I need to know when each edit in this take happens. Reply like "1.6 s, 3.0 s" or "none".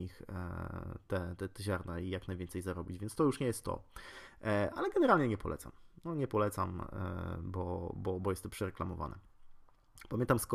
none

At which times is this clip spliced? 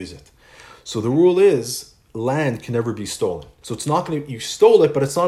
3.6 s

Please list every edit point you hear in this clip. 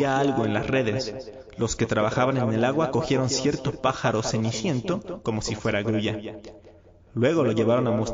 none

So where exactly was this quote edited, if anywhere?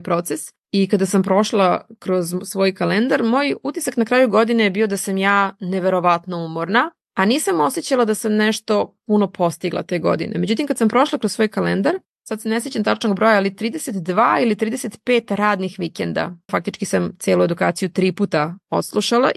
12.1 s, 16.5 s

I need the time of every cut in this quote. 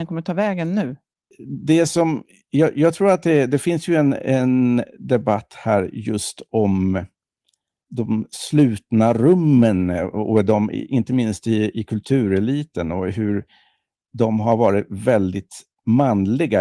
none

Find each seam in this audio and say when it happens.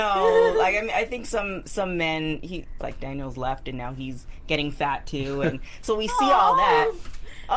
0.9 s, 2.8 s

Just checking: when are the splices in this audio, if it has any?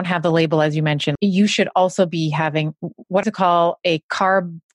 1.2 s, 3.2 s

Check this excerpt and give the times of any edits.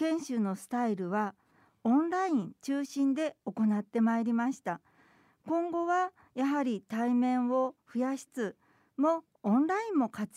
8.3 s

